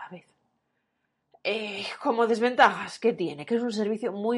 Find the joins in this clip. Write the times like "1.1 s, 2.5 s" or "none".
none